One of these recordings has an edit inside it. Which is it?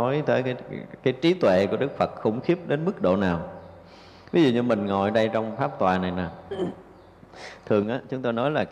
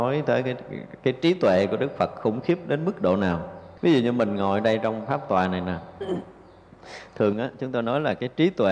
second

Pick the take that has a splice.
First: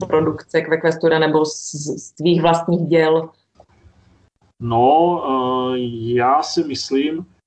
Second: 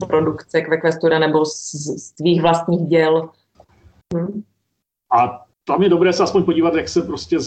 second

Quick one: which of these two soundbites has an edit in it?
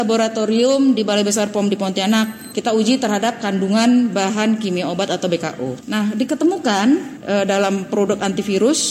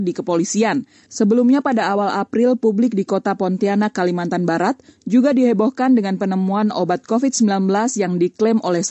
second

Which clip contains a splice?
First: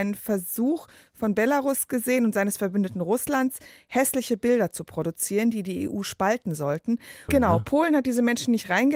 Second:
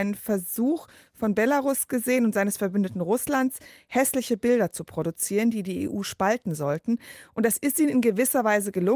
first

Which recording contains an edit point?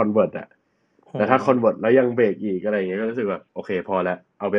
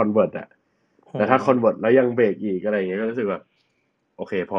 first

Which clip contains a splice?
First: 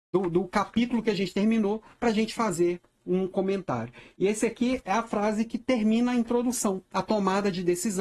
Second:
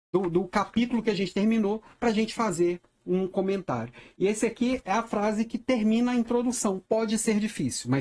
second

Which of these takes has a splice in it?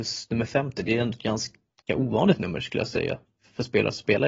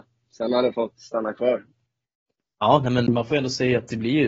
second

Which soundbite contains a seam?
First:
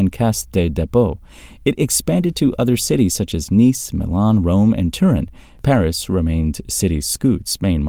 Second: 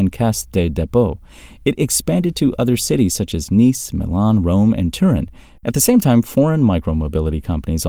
second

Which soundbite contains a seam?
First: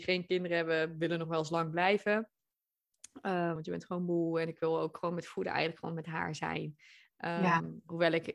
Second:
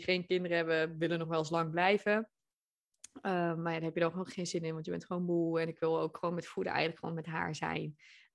first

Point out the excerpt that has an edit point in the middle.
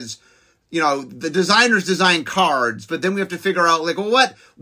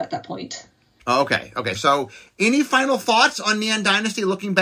second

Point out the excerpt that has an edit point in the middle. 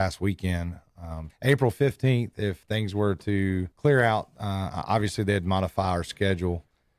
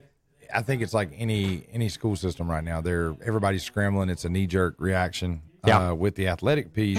first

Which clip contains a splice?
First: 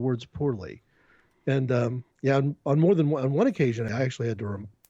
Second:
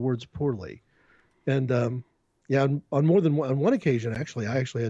first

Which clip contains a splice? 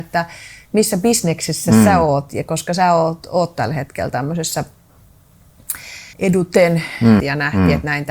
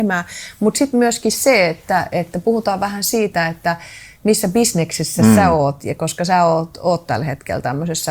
first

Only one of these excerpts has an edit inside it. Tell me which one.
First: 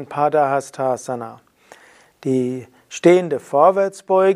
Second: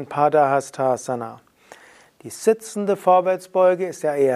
second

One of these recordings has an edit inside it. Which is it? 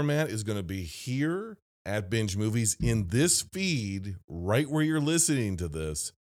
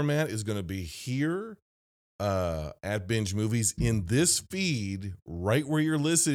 first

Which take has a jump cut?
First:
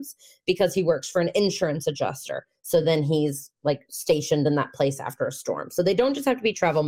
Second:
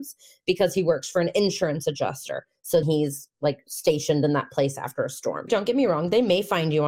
second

